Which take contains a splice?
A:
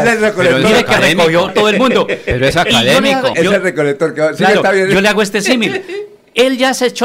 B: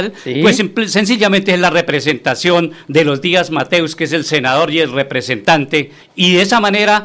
A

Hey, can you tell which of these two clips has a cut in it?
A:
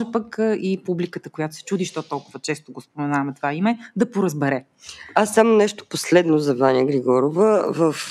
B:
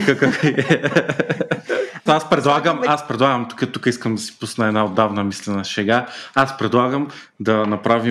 B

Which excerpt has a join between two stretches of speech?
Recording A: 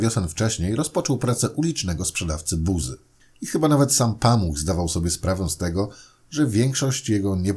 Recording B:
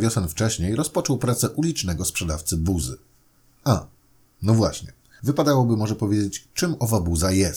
A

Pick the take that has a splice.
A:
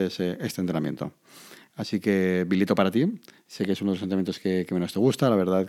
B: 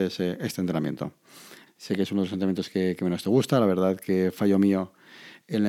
B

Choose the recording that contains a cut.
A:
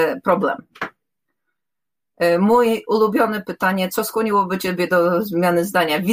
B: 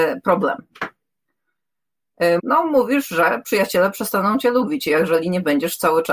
B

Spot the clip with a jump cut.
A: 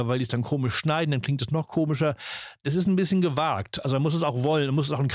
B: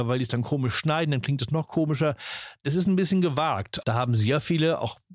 B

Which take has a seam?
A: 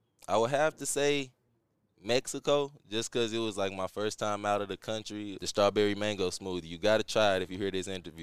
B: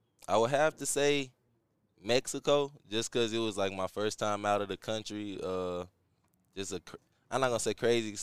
A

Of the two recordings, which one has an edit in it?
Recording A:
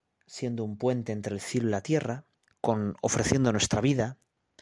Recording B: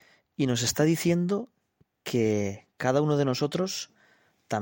A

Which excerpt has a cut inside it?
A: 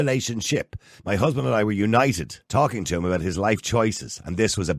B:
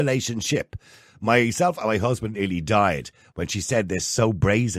A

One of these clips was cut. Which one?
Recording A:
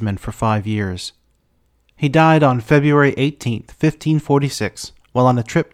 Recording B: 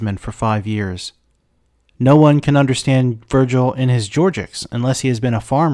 A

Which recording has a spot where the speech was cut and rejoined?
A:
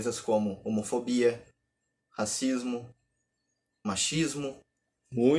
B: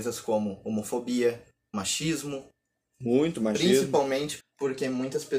B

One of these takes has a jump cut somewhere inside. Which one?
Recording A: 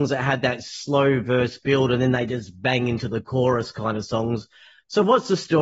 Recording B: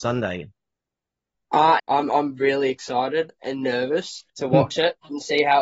B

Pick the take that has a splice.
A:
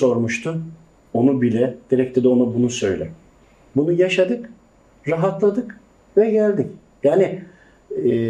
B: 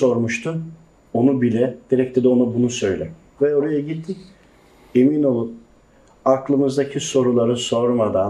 B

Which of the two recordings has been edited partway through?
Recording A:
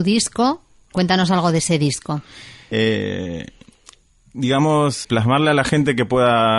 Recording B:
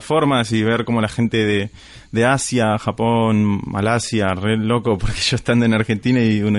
A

